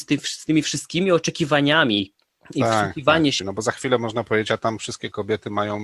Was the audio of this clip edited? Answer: yes; 1 cut; at 3.4 s

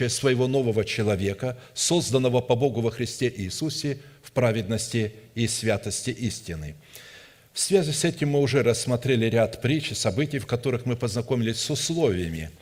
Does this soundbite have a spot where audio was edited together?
no; 0 cuts

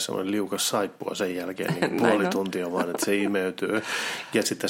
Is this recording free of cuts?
yes; 0 cuts

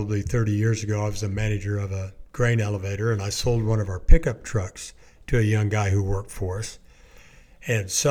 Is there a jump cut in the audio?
no; 0 cuts

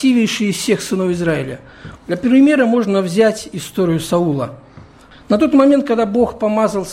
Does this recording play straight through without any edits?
no; 2 cuts; at 2.0 s, 5.1 s

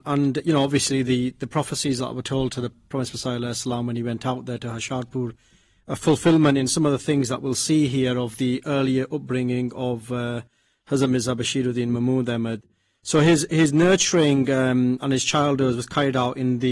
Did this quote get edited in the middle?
no; 0 cuts

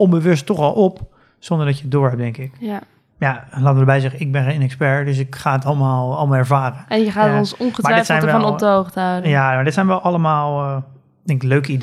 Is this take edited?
no; 0 cuts

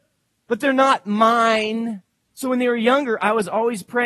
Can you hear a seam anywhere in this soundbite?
yes; 1 cut; at 2.2 s

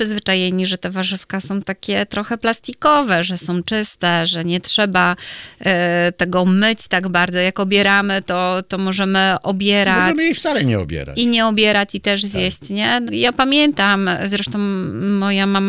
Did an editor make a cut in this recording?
yes; 1 cut; at 13.1 s

